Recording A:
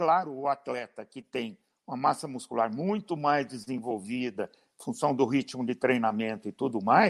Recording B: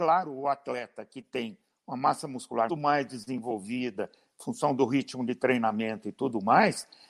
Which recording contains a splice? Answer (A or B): B